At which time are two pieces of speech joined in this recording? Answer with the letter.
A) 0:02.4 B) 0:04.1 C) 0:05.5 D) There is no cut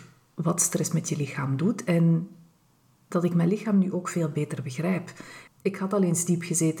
C